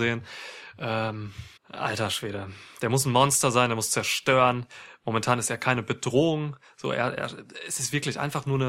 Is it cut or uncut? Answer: cut